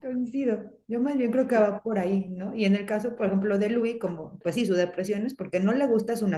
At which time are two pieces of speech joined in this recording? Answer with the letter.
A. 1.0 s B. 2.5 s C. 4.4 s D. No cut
C